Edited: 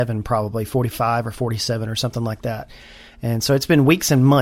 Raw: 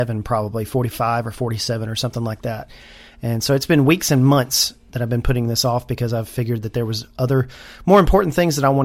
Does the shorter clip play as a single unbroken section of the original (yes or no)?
yes